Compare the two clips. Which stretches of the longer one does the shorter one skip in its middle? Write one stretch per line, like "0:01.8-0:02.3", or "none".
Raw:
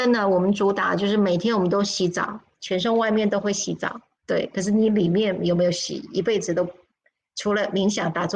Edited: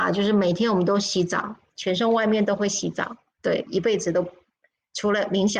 0:04.5-0:06.1